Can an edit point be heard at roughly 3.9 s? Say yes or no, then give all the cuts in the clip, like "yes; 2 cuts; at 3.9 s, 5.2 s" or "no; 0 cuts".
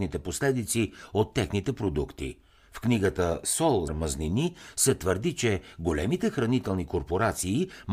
yes; 1 cut; at 3.9 s